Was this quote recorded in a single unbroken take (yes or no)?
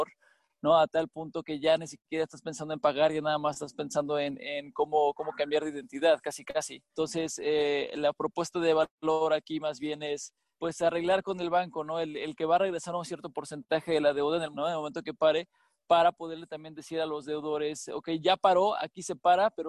yes